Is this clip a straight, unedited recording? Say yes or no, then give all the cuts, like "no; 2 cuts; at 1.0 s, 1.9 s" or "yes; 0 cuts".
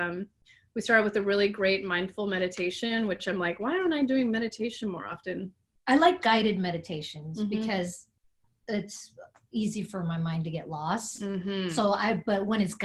yes; 0 cuts